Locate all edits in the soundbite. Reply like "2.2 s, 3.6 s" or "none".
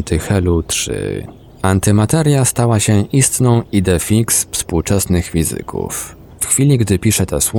none